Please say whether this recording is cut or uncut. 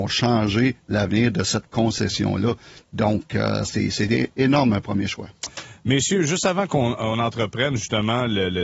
uncut